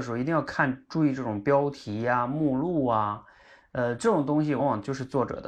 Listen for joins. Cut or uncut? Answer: cut